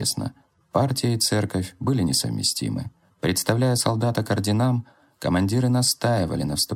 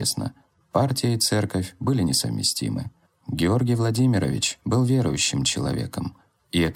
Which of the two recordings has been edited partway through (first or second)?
second